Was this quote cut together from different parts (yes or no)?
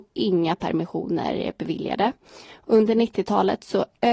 no